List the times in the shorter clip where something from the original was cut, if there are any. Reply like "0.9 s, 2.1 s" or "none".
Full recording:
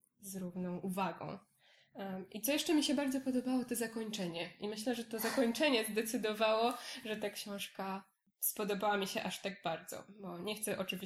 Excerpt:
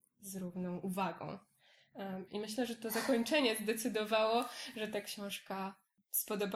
2.3 s